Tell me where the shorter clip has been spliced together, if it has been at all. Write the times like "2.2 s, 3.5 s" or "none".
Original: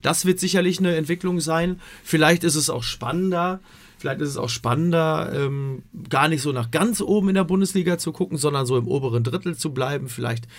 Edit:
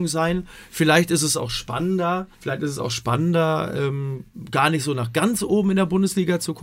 2.3 s

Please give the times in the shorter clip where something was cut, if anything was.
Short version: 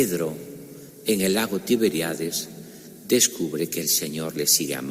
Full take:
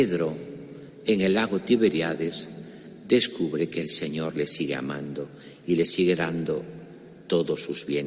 none

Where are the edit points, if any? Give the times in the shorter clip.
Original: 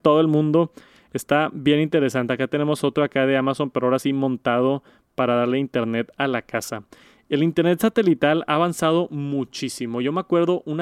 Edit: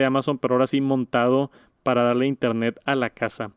none

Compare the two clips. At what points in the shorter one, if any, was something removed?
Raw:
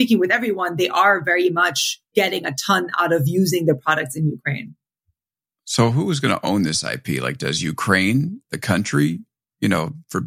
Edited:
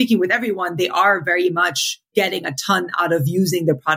none

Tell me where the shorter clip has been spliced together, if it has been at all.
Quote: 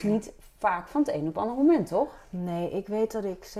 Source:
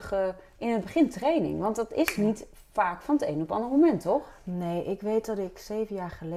none

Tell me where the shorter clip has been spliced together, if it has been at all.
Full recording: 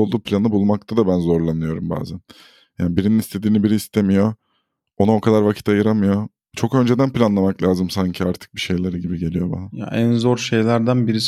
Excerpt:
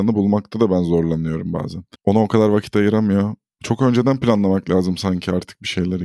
2.0 s

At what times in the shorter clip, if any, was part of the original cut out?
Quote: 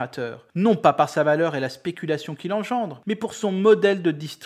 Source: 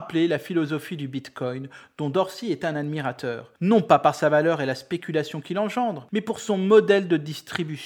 none

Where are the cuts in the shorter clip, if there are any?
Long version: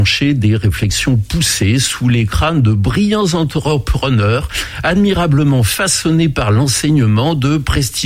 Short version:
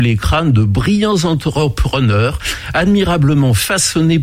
none

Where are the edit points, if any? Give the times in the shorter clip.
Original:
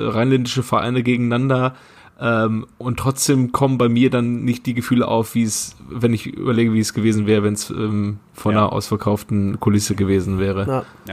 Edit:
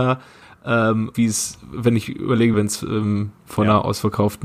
1.1 s, 2.5 s

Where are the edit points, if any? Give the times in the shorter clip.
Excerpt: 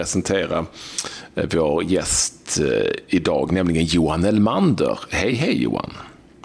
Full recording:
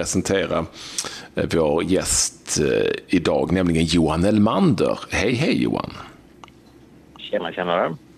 none

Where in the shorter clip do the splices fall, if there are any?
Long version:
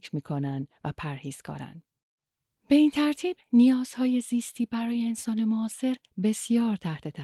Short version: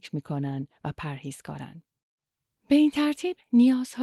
none

